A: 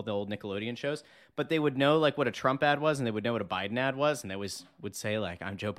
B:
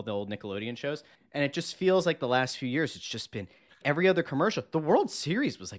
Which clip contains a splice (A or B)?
B